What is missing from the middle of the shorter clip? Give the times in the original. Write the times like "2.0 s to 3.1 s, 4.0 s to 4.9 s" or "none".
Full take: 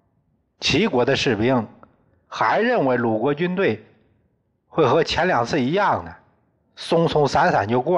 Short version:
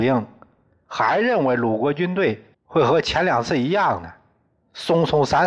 3.9 s to 4.6 s